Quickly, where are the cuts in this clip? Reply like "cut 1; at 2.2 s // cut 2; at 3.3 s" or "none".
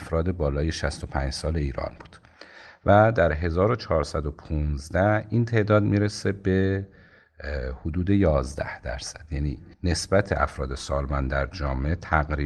cut 1; at 9.7 s